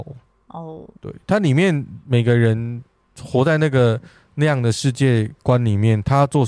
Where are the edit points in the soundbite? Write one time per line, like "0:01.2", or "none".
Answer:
0:01.0